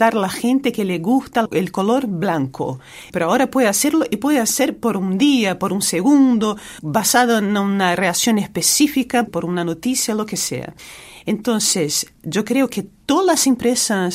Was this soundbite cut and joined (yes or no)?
yes